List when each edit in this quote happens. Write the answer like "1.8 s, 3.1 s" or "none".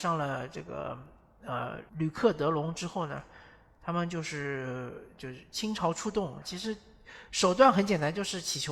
1.9 s, 6.4 s